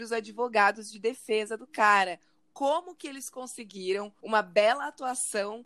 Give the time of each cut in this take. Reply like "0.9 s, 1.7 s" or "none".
none